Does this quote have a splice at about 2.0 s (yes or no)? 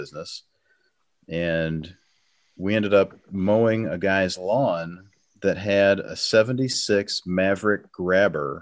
no